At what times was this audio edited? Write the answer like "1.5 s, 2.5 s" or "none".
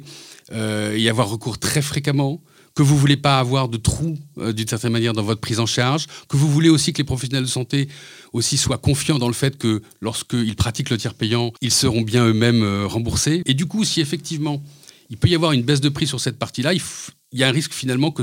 11.6 s, 13.4 s